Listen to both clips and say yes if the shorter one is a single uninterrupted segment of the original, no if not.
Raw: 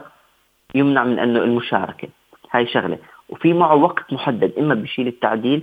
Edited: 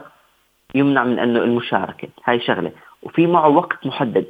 no